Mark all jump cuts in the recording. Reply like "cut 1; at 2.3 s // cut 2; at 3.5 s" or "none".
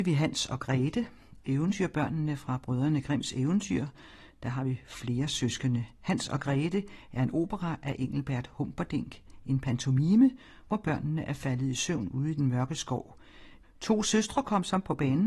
cut 1; at 13.6 s